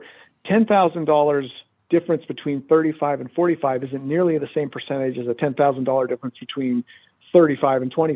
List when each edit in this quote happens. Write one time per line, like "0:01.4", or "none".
none